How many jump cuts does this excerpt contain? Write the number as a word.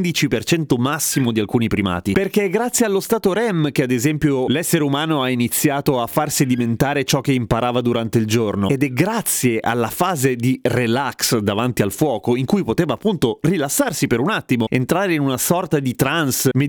one